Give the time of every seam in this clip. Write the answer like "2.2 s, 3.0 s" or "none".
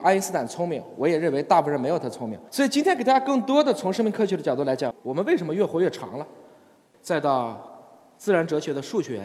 2.5 s, 4.9 s, 6.9 s